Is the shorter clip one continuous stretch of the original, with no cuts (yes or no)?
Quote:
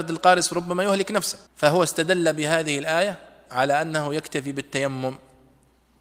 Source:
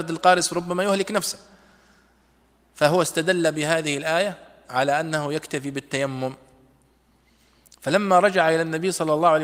no